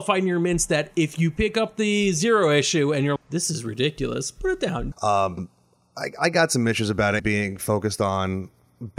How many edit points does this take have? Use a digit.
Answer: 3